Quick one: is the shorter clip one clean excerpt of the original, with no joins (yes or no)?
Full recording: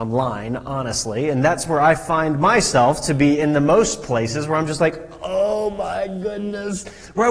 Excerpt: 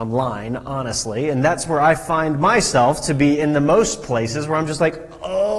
yes